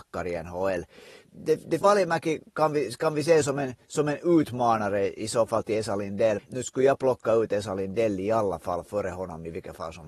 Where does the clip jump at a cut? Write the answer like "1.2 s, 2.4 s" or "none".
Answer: 1.8 s, 6.4 s